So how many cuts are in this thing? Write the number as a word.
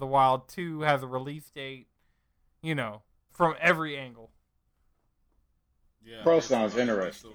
two